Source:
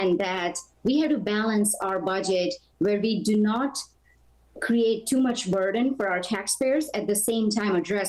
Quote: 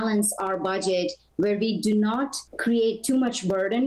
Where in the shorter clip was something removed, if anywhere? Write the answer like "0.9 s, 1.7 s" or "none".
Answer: 2.5 s